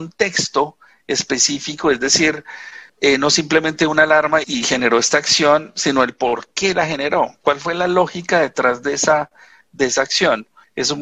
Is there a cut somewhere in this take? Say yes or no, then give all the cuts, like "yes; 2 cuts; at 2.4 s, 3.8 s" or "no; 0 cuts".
yes; 2 cuts; at 2.9 s, 4.4 s